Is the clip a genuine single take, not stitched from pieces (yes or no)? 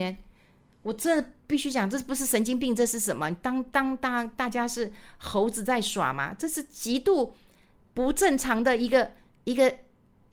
yes